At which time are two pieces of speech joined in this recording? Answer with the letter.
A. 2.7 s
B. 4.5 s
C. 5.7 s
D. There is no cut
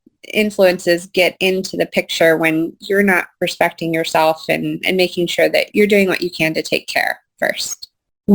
C